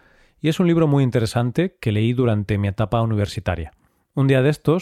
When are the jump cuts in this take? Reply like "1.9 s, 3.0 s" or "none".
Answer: none